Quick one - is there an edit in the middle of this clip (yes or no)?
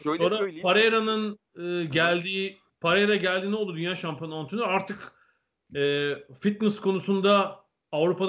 no